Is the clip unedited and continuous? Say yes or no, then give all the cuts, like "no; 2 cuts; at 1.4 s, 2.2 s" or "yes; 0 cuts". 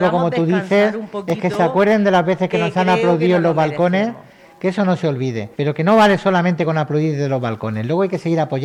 no; 1 cut; at 5.5 s